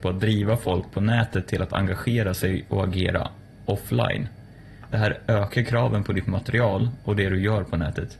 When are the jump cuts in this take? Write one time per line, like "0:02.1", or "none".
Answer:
none